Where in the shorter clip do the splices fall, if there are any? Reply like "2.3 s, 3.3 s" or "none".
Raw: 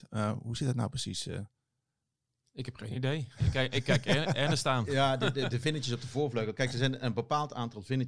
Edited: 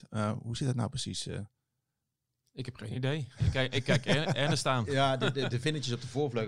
none